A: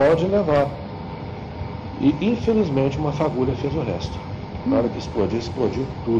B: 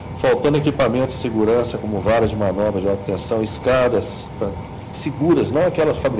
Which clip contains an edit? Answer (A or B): B